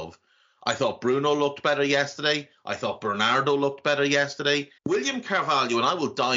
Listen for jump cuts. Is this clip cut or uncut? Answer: cut